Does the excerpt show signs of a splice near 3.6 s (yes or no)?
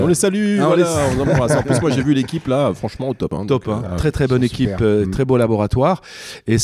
no